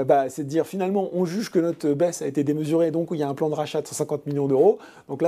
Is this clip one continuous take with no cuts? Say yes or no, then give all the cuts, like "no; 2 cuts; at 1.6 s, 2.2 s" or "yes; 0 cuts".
yes; 0 cuts